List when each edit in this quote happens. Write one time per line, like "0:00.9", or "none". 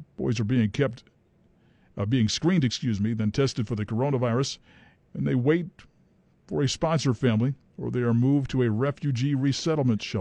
none